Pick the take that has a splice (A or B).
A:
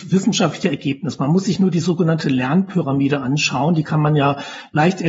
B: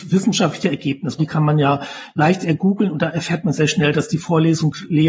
B